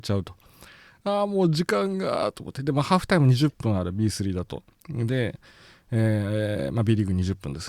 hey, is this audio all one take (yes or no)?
yes